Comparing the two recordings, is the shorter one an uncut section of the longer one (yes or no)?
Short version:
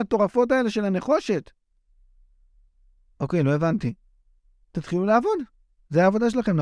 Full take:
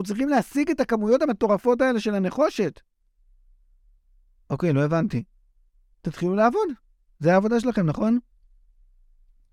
yes